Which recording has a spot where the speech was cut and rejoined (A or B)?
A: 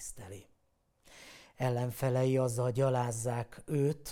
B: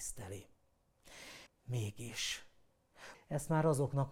B